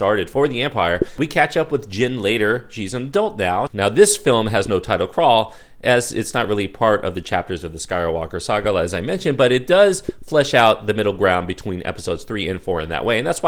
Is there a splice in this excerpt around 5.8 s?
no; 1 cut; at 3.7 s

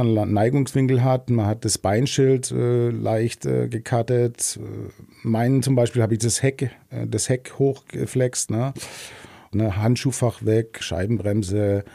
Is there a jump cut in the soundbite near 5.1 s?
no; 2 cuts; at 9.5 s, 10.8 s

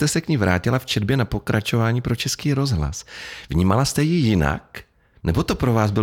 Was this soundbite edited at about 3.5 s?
no; 0 cuts

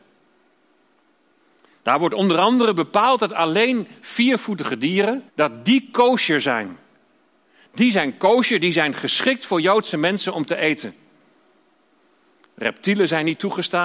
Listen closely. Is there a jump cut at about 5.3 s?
yes; 1 cut; at 5.3 s

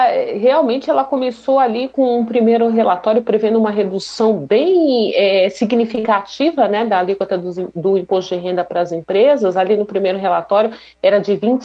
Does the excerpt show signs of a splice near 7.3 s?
no; 0 cuts

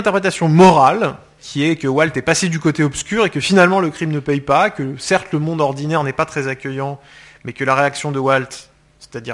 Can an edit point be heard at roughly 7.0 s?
no; 1 cut; at 1.4 s

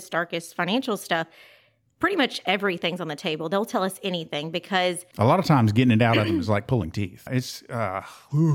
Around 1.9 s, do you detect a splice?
no; 1 cut; at 7.3 s

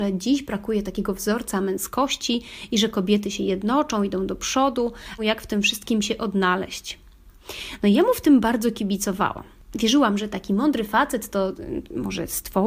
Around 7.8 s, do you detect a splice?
no; 1 cut; at 5.2 s

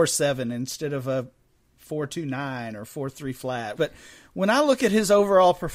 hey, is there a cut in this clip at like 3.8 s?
yes; 1 cut; at 3.8 s

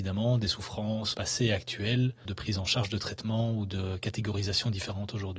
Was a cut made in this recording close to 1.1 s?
yes; 2 cuts; at 1.1 s, 2.3 s

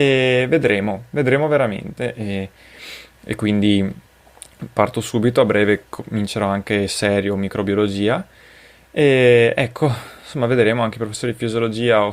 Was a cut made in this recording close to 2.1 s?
yes; 1 cut; at 2.1 s

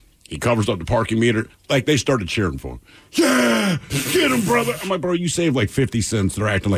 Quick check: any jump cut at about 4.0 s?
no; 0 cuts

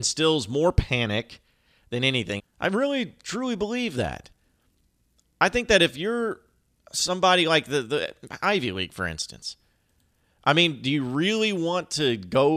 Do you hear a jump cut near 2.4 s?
yes; 1 cut; at 2.4 s

